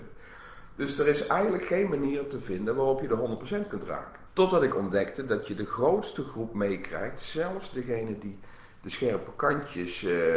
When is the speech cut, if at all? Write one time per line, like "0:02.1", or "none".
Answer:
0:04.3